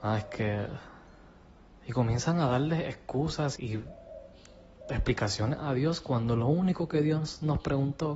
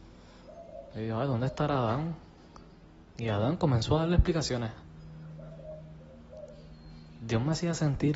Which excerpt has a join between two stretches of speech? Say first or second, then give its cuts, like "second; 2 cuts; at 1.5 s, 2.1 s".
first; 1 cut; at 3.6 s